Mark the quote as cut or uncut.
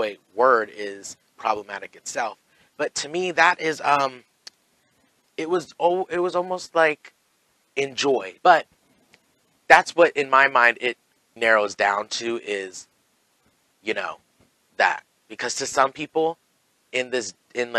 cut